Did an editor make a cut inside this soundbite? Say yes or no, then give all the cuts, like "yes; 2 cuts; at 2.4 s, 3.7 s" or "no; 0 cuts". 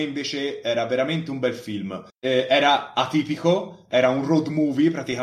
yes; 1 cut; at 2.1 s